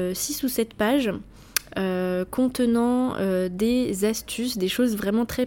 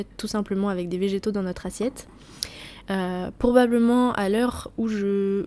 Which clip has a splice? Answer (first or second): second